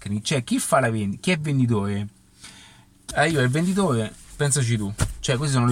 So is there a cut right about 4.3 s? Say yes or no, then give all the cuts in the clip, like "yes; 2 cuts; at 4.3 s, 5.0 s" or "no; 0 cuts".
yes; 2 cuts; at 3.1 s, 4.3 s